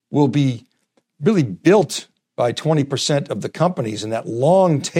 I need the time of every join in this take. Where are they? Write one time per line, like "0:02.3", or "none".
none